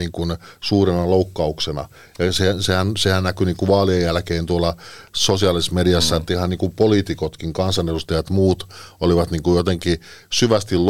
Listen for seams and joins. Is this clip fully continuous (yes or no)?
yes